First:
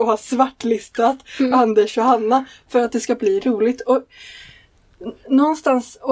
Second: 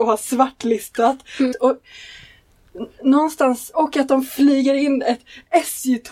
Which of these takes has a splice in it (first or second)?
second